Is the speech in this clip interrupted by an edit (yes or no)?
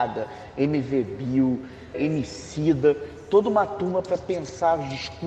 yes